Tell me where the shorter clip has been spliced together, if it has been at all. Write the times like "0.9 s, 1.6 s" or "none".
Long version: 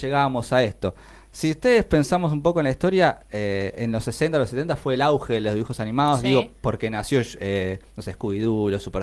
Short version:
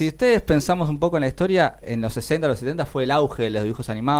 1.8 s